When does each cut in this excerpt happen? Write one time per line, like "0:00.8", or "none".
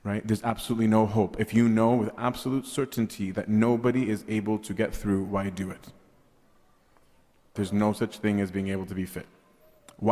0:07.6